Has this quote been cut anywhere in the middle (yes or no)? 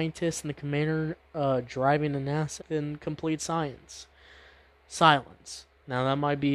yes